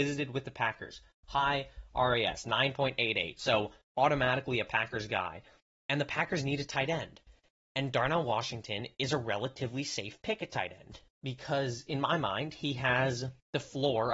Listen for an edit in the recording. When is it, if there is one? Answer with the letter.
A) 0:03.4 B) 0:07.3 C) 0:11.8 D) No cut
D